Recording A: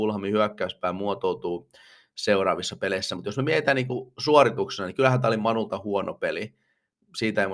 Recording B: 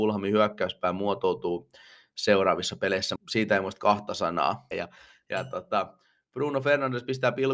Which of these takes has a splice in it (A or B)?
B